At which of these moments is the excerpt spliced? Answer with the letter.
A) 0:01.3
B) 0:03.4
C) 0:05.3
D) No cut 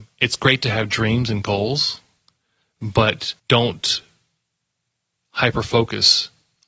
B